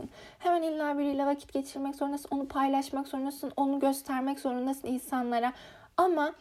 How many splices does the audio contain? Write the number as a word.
zero